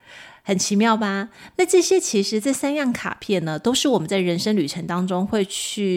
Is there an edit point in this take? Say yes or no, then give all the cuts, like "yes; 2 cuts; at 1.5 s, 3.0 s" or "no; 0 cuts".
no; 0 cuts